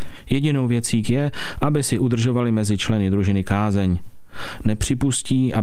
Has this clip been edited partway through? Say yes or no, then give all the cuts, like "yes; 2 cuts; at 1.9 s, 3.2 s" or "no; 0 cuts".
yes; 1 cut; at 1.0 s